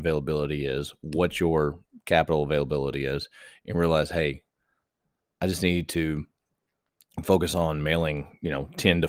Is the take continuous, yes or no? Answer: yes